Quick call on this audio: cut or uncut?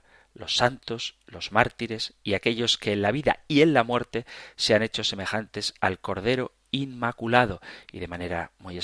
uncut